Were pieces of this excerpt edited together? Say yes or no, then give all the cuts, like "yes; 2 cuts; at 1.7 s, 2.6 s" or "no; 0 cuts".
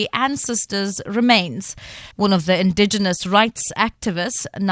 yes; 1 cut; at 2.1 s